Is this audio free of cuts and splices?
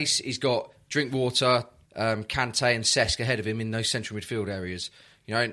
no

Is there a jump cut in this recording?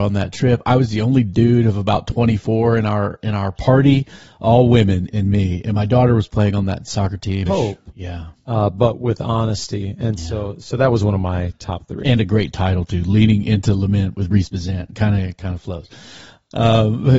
yes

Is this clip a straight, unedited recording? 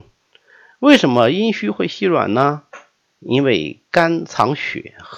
yes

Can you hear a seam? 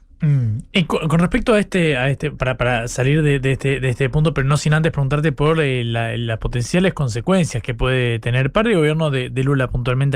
no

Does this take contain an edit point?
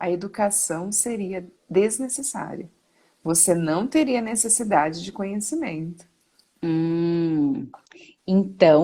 yes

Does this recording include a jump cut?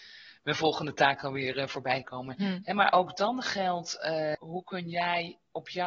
yes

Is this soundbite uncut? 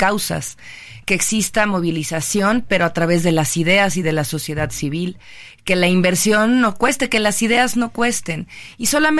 yes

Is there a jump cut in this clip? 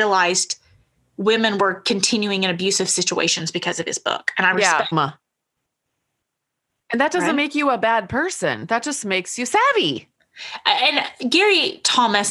yes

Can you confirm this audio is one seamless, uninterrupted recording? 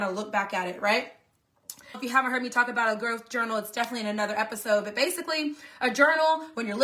no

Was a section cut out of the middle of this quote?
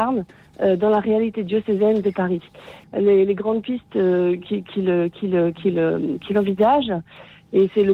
yes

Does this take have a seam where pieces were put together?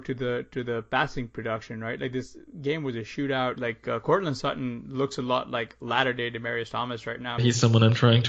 yes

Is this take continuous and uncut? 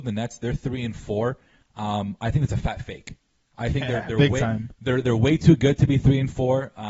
yes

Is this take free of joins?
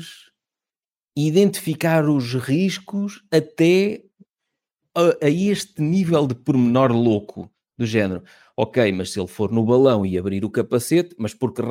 yes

